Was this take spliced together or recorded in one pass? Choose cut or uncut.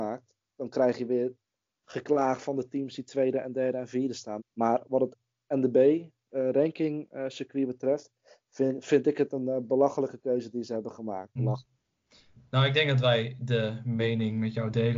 cut